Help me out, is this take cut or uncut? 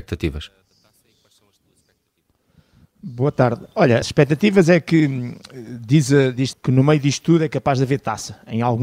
cut